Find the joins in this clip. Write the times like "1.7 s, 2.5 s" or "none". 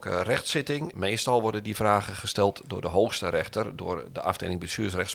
0.9 s